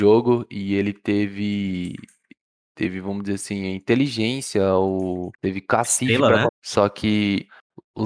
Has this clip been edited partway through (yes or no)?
yes